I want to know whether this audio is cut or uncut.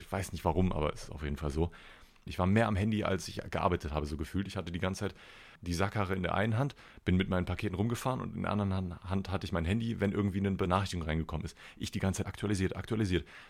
cut